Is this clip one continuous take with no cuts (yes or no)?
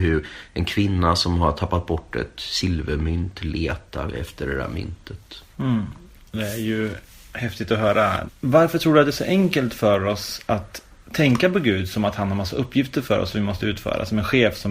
no